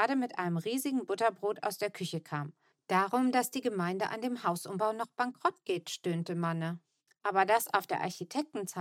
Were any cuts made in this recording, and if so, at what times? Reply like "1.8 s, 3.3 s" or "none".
2.7 s, 7.1 s